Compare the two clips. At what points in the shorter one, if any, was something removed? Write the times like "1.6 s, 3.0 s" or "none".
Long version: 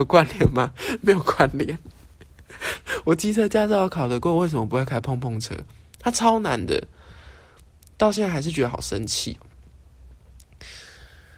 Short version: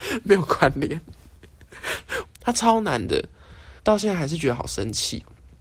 2.2 s, 3.8 s